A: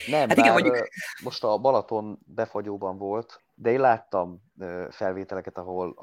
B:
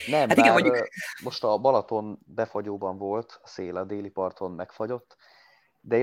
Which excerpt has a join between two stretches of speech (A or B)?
A